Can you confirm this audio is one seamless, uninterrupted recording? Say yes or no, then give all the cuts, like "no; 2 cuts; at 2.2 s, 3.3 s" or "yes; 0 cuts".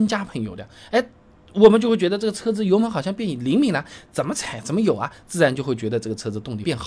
yes; 0 cuts